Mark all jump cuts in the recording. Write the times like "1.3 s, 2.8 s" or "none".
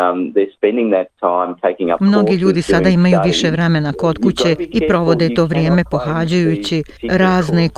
none